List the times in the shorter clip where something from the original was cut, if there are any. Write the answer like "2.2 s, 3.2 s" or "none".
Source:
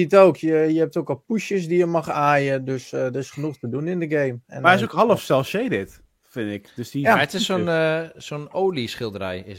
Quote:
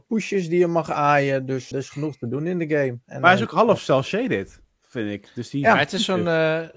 1.7 s

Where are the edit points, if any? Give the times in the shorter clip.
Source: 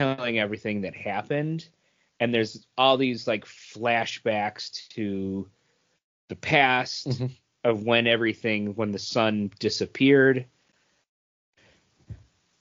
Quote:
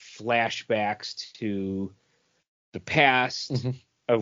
none

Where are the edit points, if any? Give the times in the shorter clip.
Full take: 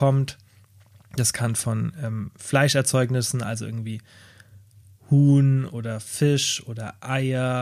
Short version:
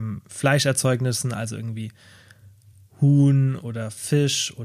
none

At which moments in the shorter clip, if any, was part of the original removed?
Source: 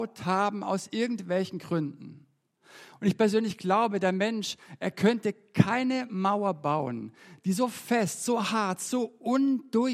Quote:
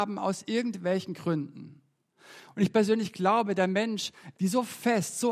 4.3 s

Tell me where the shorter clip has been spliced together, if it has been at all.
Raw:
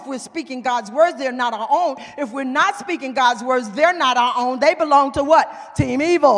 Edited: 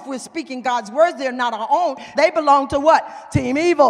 2.1 s

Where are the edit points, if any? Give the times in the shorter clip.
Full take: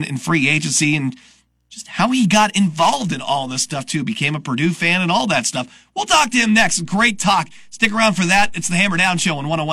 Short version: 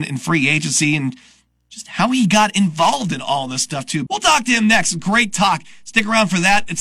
4.1 s

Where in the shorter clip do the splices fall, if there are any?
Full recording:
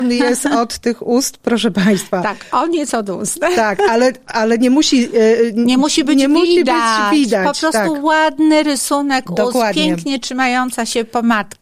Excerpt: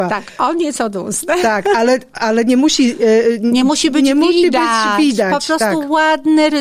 none

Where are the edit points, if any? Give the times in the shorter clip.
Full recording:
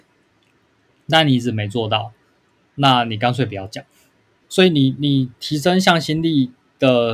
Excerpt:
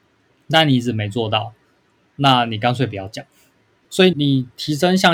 4.1 s

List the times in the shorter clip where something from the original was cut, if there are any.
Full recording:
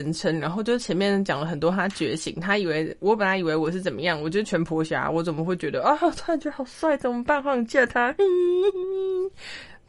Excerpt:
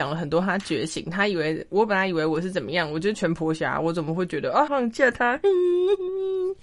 4.7 s

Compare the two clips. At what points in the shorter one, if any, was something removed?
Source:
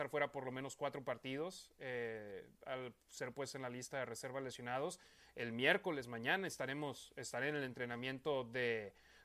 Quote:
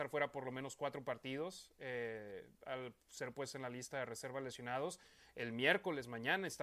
none

